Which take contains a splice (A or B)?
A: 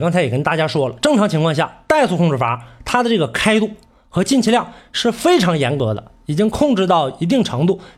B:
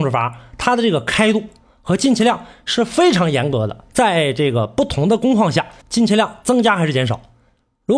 B